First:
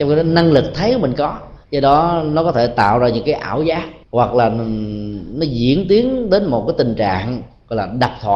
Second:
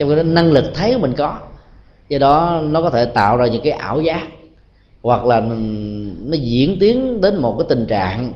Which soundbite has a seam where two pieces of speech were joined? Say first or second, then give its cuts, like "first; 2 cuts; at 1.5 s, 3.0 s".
first; 2 cuts; at 1.6 s, 4.0 s